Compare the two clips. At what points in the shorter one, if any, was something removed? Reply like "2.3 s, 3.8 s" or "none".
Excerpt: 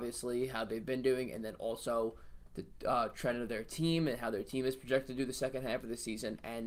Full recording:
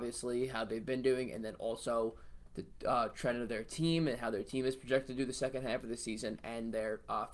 none